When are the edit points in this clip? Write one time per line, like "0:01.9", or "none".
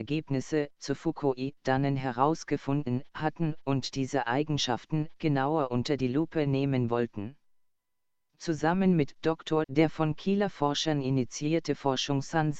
0:09.6